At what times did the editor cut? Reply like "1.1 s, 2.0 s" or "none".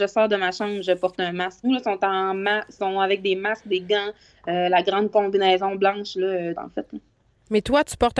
1.6 s, 6.5 s